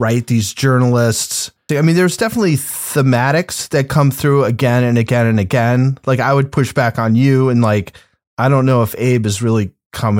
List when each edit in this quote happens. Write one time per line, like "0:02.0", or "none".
0:01.7